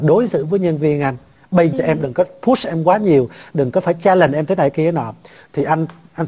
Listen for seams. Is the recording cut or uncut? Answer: cut